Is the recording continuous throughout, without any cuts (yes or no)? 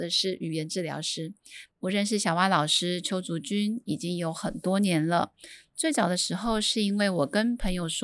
no